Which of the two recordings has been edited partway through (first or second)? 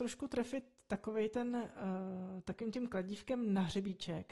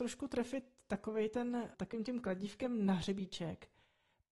second